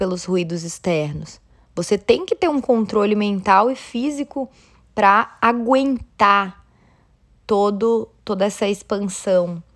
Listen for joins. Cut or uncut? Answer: uncut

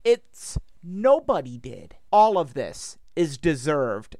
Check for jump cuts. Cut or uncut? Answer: cut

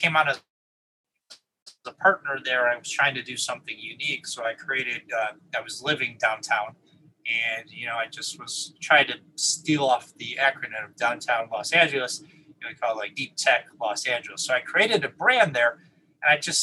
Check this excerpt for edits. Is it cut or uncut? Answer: cut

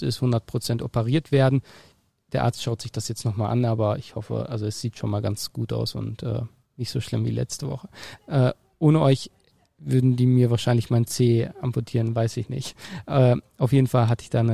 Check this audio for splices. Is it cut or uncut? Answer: cut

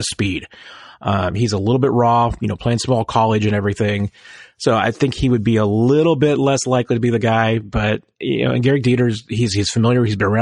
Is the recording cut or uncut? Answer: uncut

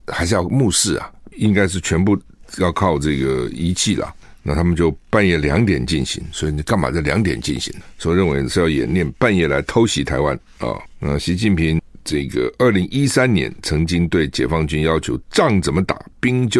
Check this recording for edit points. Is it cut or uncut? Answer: cut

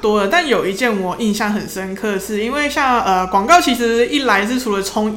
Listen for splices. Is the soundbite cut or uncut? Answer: uncut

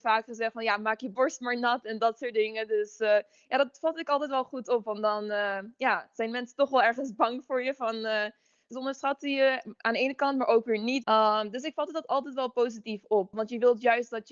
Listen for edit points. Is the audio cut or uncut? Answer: cut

